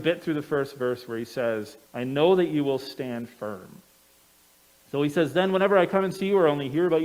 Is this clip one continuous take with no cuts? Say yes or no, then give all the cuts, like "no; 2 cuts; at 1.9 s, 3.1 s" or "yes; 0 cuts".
no; 1 cut; at 1.8 s